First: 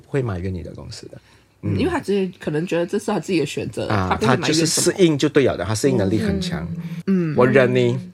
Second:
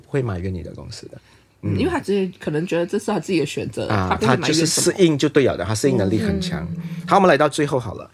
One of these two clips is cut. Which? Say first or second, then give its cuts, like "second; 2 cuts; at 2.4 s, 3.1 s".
first; 1 cut; at 7.0 s